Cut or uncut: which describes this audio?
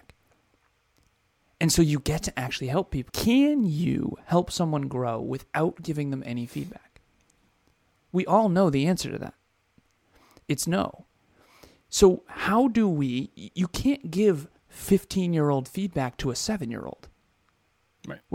cut